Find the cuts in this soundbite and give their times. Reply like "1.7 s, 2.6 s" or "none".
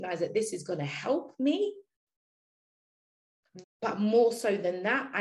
3.6 s